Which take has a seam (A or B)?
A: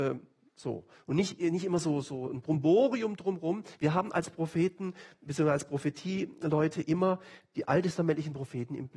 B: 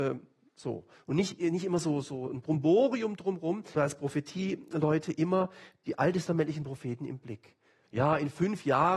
B